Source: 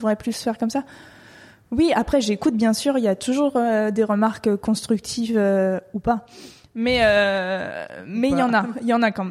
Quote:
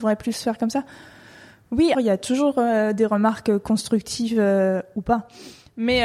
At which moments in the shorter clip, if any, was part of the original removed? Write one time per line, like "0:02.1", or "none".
0:01.9